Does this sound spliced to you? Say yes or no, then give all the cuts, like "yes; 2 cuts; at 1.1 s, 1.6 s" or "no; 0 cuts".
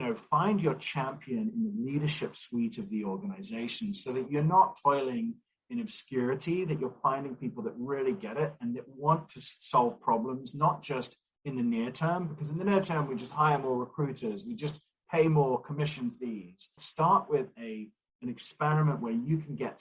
yes; 1 cut; at 16.8 s